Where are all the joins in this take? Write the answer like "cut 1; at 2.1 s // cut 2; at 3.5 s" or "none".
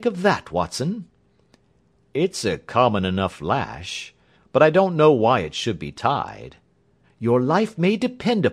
cut 1; at 7.0 s